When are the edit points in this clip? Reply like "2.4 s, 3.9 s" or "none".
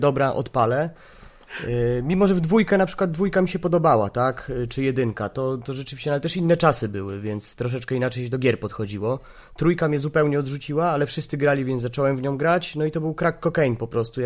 none